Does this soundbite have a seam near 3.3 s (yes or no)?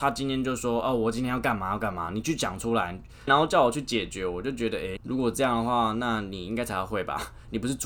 yes